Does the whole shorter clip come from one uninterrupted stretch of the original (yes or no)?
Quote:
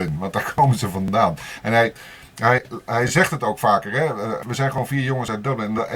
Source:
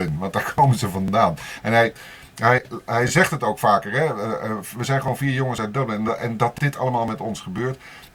no